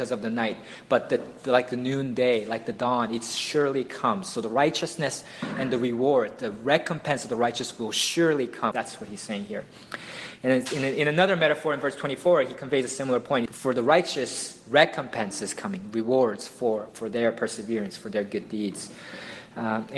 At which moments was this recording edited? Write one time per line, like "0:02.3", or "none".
0:08.7
0:13.5